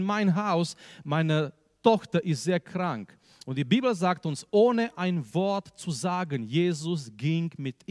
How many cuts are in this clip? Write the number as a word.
zero